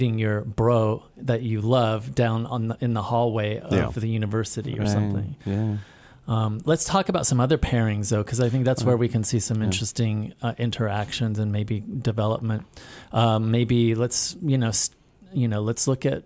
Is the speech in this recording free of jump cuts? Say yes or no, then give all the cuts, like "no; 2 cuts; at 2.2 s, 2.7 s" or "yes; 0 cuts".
yes; 0 cuts